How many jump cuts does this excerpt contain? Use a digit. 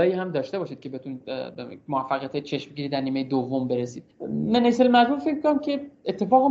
1